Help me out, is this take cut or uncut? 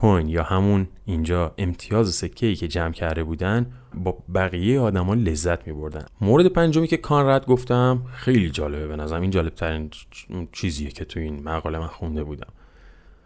cut